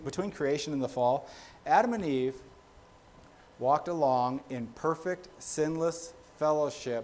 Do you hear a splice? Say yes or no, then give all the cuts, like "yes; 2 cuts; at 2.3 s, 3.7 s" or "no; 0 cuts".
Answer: no; 0 cuts